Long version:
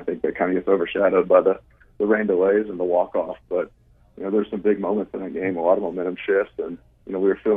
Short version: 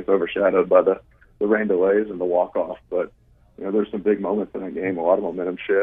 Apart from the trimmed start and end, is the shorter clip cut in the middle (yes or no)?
no